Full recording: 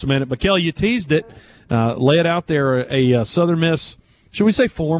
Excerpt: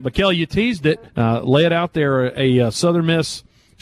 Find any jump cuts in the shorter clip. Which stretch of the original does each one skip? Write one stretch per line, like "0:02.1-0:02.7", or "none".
0:01.3-0:01.6